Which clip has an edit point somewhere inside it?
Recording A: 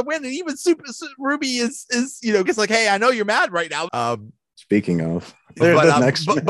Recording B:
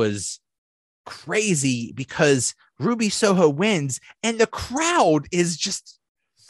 A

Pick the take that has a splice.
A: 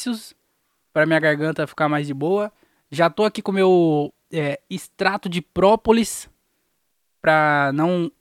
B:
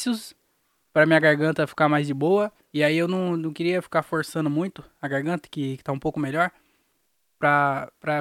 B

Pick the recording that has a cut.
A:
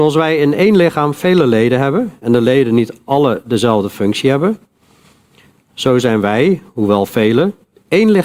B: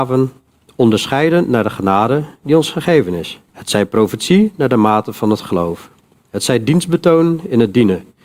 B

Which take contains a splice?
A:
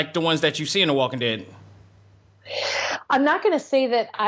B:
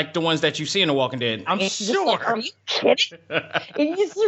B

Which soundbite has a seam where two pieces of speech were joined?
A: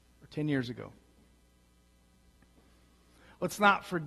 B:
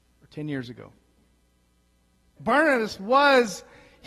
B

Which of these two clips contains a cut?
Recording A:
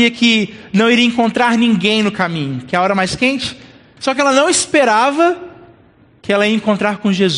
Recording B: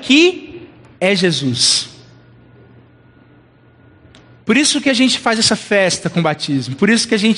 A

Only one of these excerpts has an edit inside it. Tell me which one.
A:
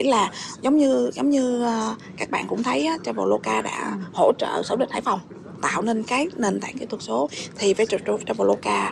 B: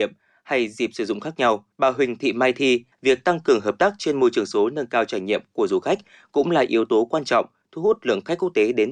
B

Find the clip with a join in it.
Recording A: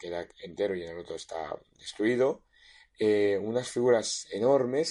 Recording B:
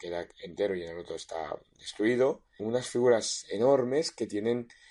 B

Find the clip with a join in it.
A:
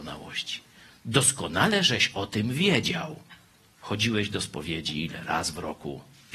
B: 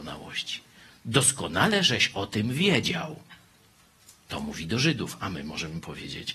A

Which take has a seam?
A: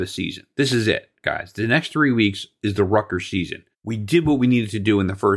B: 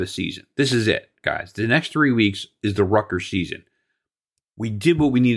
A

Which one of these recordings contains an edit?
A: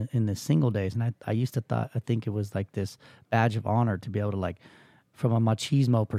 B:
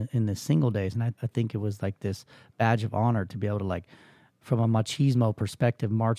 B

